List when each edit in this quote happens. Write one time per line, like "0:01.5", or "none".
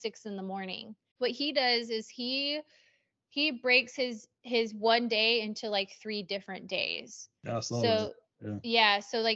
0:01.1